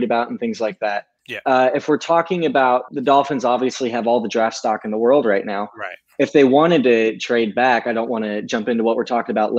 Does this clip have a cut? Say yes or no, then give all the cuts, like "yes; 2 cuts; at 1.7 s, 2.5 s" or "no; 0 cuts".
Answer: yes; 2 cuts; at 1.2 s, 2.9 s